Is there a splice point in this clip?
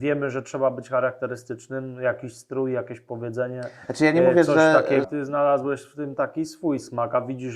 yes; 1 cut; at 5.0 s

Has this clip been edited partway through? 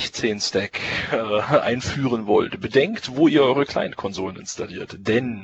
no; 0 cuts

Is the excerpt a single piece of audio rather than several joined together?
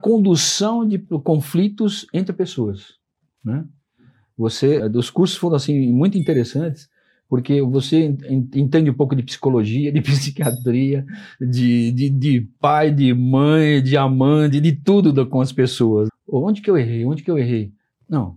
no; 2 cuts; at 4.8 s, 16.1 s

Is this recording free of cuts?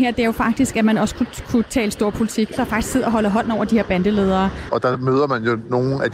no; 2 cuts; at 2.6 s, 4.7 s

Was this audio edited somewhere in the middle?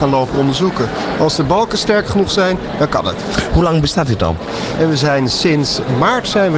yes; 1 cut; at 4.8 s

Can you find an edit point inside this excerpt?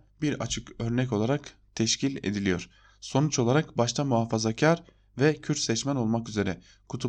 no; 0 cuts

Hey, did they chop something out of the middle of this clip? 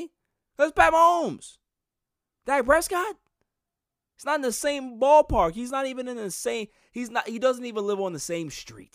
no; 0 cuts

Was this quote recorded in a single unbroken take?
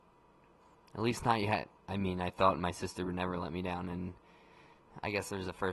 yes; 0 cuts

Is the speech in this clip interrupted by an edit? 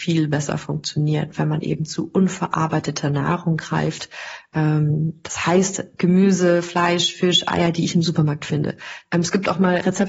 yes; 1 cut; at 9.0 s

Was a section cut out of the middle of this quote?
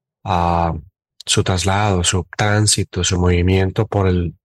no; 0 cuts

